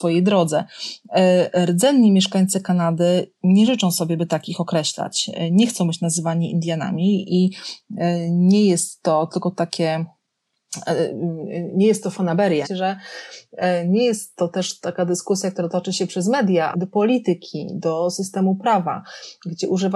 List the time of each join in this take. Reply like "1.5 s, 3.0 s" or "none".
12.6 s, 16.7 s